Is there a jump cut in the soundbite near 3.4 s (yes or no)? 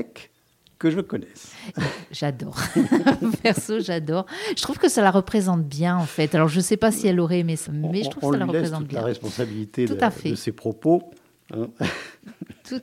no